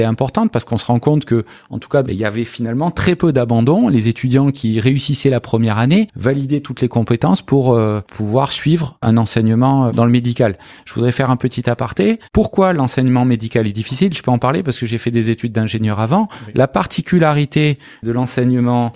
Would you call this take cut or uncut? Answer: cut